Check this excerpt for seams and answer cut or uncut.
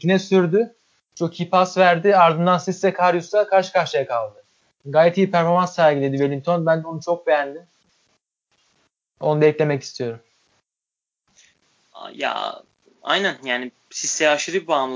uncut